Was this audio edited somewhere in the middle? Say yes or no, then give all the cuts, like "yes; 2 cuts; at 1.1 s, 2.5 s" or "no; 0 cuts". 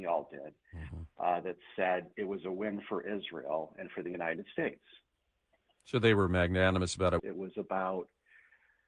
yes; 1 cut; at 7.2 s